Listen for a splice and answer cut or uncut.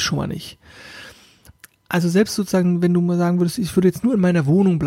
uncut